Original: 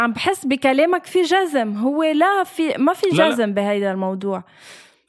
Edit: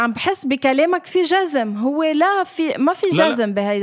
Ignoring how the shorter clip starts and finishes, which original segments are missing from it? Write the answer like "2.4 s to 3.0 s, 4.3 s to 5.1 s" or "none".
none

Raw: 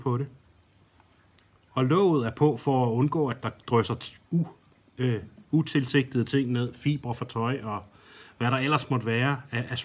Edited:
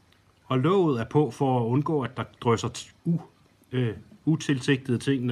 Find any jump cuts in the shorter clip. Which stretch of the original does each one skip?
none

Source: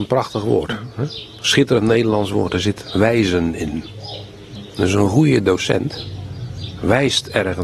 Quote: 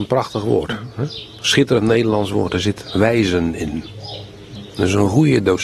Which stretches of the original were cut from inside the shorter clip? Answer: none

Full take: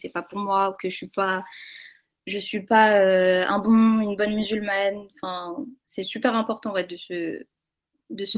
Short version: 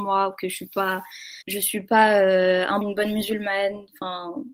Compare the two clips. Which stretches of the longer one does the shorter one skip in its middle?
1.8 s to 2.2 s, 3.6 s to 4.0 s

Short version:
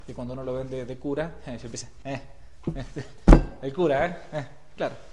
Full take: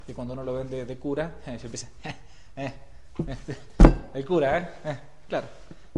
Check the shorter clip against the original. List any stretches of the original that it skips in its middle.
2.0 s to 2.5 s

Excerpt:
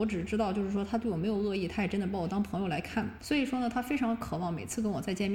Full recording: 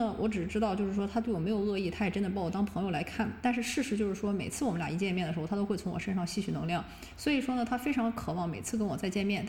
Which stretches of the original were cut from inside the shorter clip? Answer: 3.4 s to 7.1 s

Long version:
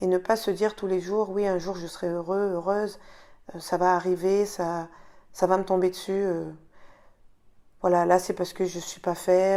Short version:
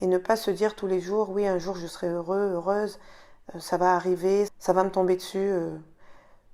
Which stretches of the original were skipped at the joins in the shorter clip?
4.5 s to 5.2 s

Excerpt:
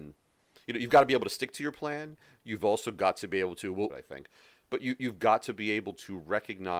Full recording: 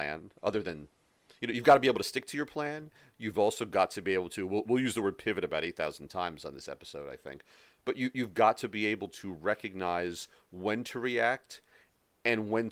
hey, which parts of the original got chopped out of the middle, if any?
4.6 s to 7.0 s

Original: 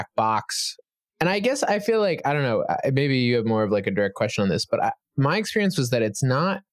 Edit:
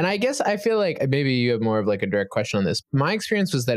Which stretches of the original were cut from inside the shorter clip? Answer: 2.2 s to 2.8 s, 4.7 s to 5.1 s

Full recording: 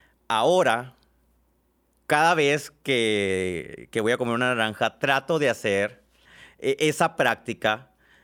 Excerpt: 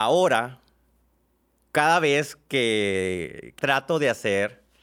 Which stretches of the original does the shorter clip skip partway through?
3.9 s to 5.0 s

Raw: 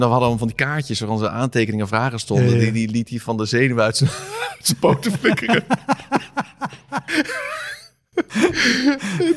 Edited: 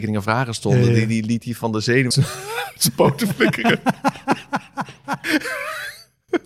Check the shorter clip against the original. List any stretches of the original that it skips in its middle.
3.8 s to 3.9 s

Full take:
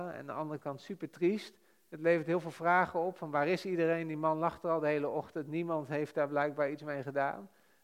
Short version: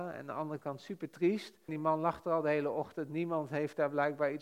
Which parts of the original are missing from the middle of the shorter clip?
1.7 s to 4.1 s

